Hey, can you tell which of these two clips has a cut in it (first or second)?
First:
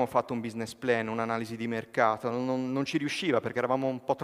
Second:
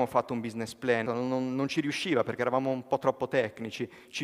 second